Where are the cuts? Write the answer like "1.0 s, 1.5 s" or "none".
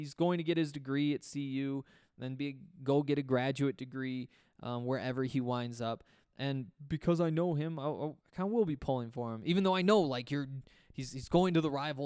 8.2 s